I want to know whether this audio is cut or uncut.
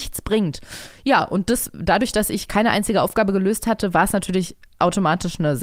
uncut